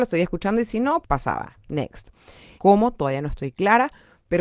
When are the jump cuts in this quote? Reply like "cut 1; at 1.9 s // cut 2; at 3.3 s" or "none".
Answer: cut 1; at 1.0 s // cut 2; at 2.6 s